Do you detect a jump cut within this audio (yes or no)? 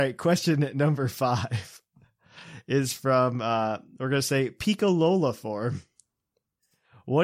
no